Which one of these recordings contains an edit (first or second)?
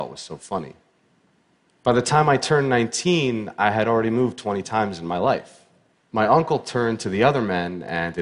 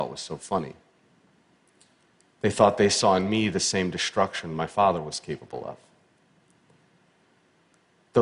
first